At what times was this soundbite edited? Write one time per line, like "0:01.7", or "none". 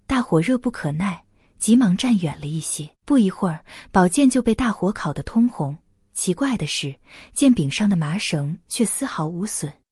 0:02.9